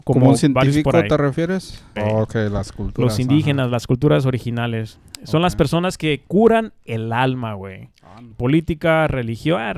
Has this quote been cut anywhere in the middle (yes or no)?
yes